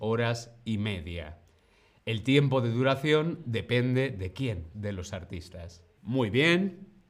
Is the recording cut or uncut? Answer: cut